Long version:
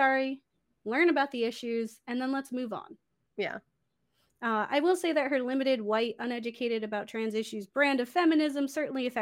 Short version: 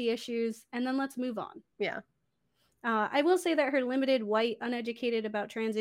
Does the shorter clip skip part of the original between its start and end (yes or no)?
yes